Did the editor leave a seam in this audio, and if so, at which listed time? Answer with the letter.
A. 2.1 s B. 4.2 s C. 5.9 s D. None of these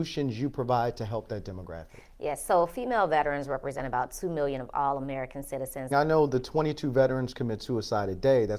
C